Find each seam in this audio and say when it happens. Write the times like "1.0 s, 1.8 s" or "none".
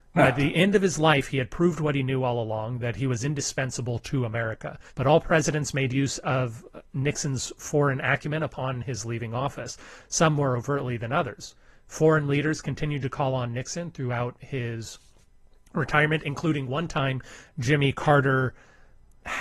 4.9 s